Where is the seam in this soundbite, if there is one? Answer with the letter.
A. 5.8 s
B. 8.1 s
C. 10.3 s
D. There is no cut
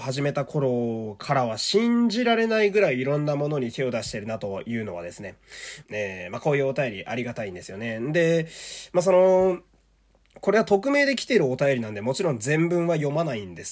A